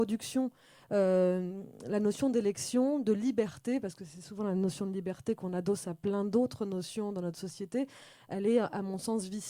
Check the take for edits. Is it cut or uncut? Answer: uncut